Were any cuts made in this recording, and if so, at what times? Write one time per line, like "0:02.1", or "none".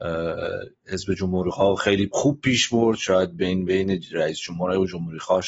none